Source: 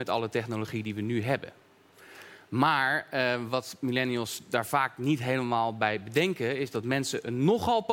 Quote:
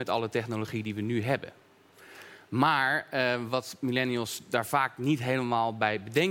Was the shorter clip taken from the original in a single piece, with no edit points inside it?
yes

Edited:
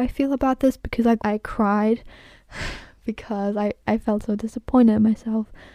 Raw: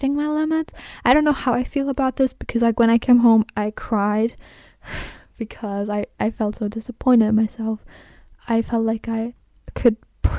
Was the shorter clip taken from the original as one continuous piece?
no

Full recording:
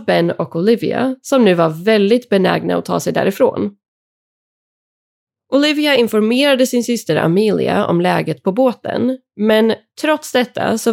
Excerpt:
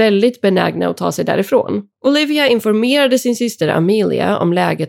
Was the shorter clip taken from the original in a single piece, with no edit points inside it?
no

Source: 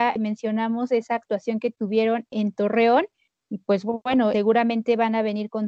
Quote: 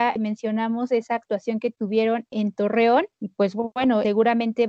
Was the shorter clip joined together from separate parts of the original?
yes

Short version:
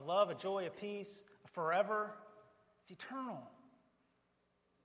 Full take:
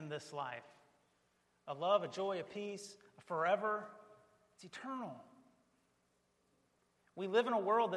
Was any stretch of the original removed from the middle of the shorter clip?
no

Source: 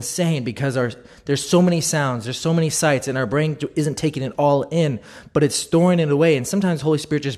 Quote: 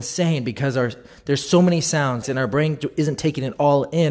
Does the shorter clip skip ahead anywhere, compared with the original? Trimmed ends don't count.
yes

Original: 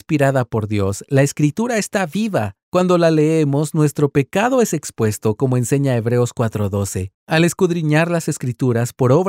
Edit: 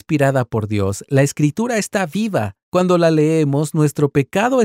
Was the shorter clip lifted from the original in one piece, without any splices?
yes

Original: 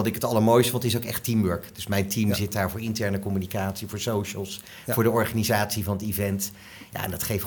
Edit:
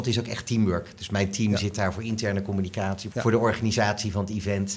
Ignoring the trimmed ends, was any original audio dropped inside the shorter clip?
yes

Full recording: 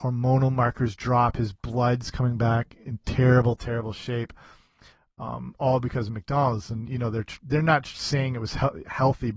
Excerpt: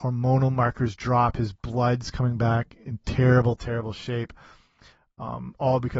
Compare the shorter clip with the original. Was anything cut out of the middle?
no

